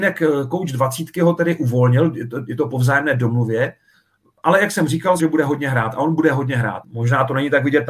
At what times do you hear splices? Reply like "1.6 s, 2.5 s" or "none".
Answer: 5.2 s, 6.8 s

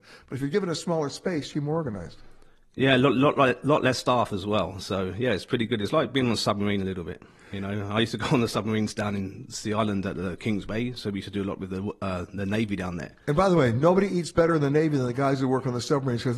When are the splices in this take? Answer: 1.5 s

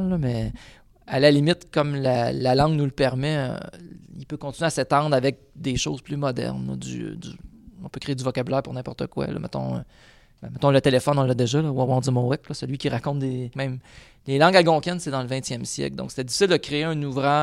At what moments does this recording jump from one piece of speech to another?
13.5 s

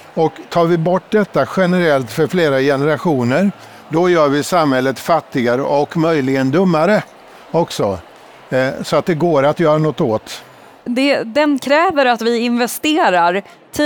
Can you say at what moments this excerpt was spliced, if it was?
10.9 s

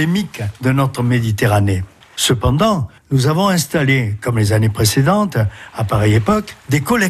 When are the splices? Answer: 2.0 s

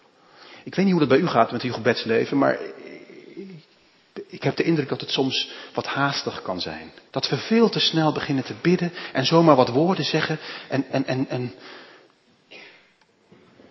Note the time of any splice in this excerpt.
7.1 s

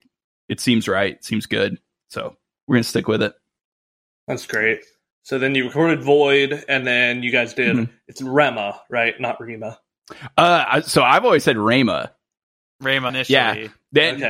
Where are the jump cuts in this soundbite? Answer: 13.1 s

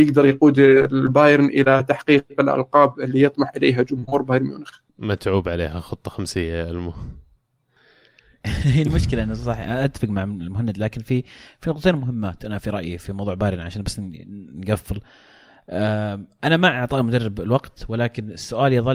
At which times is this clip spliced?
4.9 s

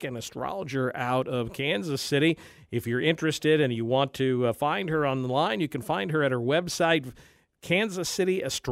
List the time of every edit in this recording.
none

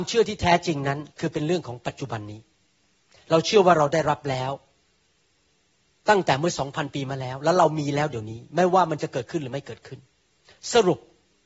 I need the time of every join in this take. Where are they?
1.1 s

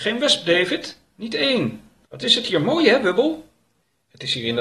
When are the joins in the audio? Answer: 2.1 s

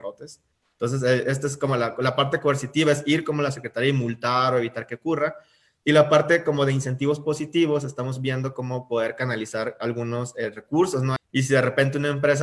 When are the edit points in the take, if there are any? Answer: 11.2 s

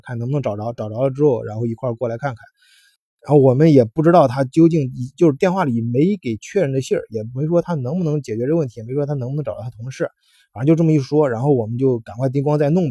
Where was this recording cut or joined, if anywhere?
none

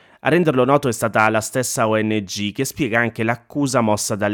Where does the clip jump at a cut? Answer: none

